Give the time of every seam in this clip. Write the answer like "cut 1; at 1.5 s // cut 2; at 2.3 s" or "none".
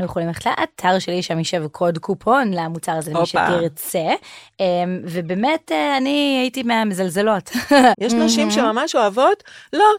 cut 1; at 7.9 s